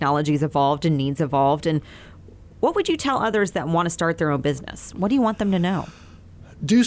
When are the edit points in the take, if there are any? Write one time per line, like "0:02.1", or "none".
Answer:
none